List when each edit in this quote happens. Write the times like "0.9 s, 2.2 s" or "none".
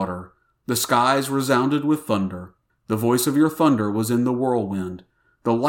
2.7 s